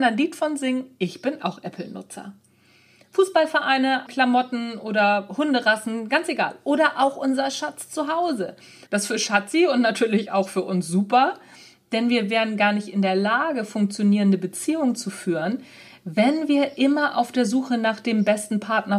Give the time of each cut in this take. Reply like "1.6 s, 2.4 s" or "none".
4.1 s, 8.9 s